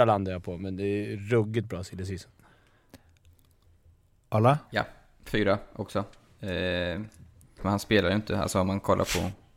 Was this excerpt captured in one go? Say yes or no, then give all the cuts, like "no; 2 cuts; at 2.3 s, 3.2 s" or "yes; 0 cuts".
no; 1 cut; at 7.6 s